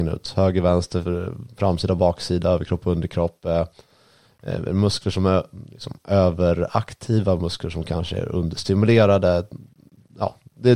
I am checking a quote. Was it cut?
no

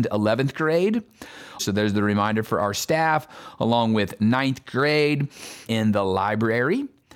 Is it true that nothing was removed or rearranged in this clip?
no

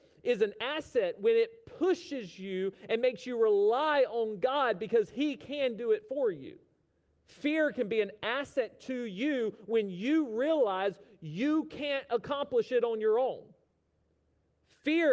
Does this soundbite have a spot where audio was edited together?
yes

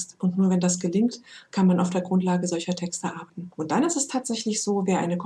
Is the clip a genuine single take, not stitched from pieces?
no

